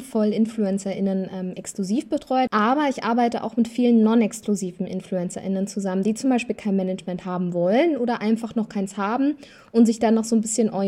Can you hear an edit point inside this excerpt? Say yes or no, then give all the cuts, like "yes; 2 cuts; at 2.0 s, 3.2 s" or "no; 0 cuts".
yes; 1 cut; at 2.5 s